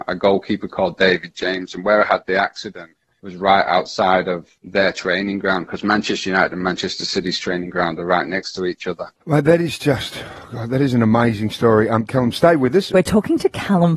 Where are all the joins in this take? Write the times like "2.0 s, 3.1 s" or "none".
9.2 s, 12.9 s